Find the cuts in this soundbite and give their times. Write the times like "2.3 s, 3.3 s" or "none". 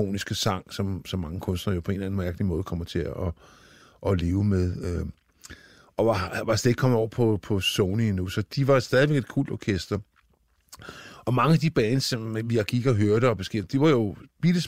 none